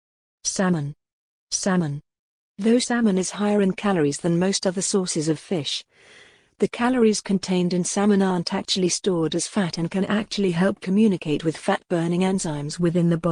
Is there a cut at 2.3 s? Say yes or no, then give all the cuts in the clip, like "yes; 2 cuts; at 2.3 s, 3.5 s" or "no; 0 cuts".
no; 0 cuts